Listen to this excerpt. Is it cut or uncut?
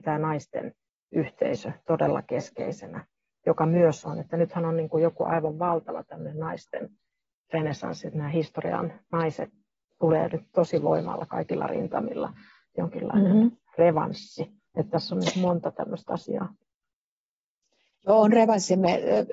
uncut